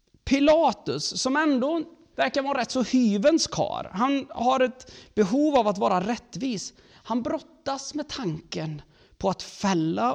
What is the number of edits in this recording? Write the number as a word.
one